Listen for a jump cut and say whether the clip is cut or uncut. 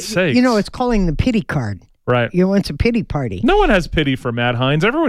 uncut